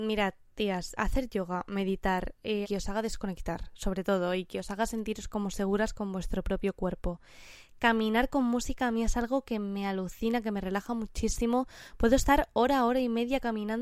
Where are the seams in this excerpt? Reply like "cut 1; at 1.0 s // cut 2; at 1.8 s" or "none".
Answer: cut 1; at 1.0 s // cut 2; at 2.6 s

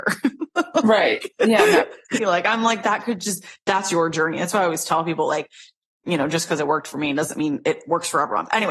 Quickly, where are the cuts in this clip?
cut 1; at 2.2 s

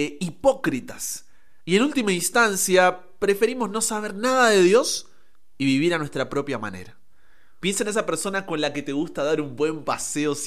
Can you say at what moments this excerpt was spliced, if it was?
cut 1; at 7.6 s

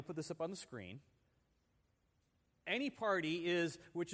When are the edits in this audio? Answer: none

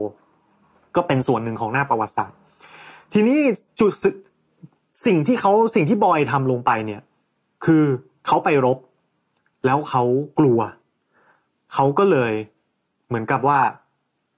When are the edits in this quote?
none

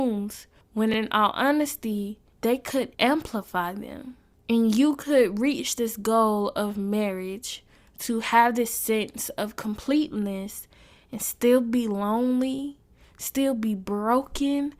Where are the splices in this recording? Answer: none

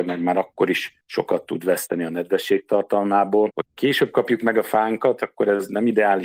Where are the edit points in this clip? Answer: cut 1; at 3.5 s

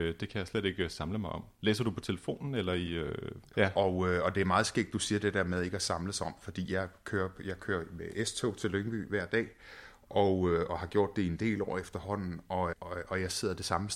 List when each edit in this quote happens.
cut 1; at 3.5 s // cut 2; at 12.7 s

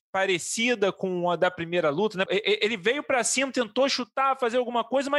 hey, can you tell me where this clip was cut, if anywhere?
cut 1; at 2.3 s

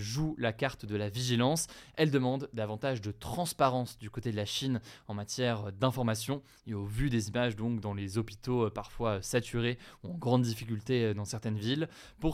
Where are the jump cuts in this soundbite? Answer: none

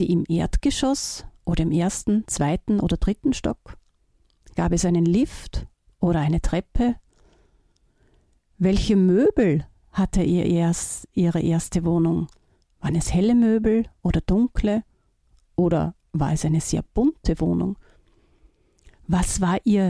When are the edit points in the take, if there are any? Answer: none

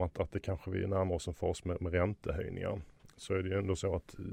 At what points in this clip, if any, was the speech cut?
none

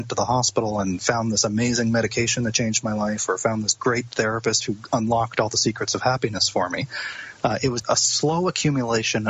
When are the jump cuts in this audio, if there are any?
cut 1; at 7.8 s

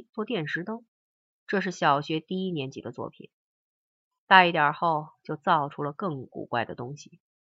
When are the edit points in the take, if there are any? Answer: none

